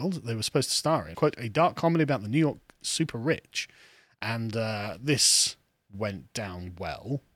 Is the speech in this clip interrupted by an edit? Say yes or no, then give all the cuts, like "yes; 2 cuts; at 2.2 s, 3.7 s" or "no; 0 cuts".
yes; 1 cut; at 1.1 s